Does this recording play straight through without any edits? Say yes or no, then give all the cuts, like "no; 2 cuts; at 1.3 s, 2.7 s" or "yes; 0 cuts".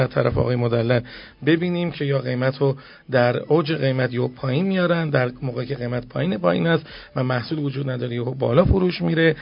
yes; 0 cuts